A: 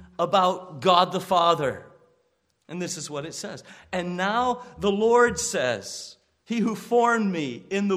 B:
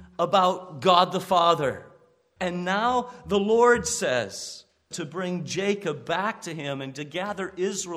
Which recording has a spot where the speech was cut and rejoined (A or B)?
B